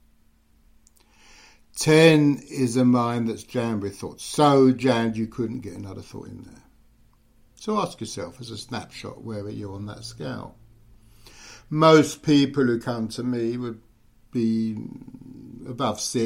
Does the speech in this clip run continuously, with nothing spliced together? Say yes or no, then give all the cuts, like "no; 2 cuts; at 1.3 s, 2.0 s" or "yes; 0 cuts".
yes; 0 cuts